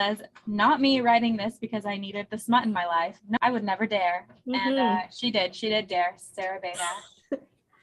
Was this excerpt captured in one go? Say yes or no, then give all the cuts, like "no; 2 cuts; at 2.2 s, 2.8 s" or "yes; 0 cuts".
no; 1 cut; at 3.4 s